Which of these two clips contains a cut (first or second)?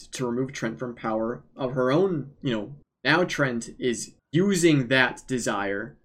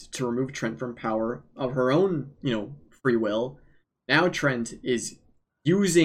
first